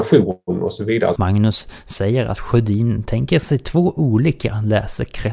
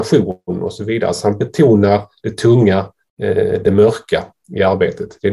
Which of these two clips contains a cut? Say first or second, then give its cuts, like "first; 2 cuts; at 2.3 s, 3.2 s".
first; 1 cut; at 1.2 s